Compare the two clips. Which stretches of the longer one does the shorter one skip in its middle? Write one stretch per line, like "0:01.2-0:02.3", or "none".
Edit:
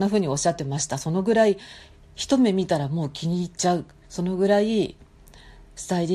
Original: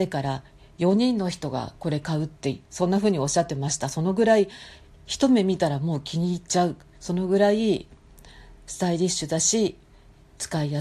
none